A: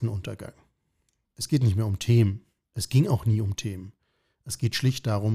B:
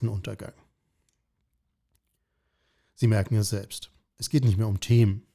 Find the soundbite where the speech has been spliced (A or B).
A